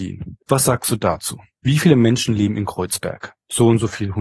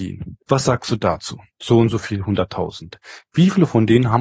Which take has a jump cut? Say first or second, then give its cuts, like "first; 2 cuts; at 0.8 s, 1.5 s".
second; 1 cut; at 1.5 s